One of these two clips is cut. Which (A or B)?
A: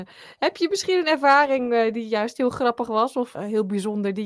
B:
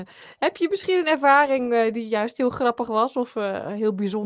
A